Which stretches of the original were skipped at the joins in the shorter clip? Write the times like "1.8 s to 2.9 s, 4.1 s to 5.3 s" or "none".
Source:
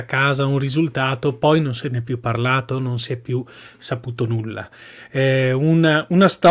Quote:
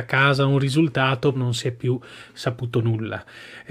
1.3 s to 2.8 s